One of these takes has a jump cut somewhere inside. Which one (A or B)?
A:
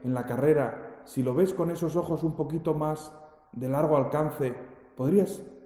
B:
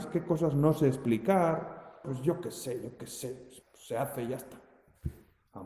B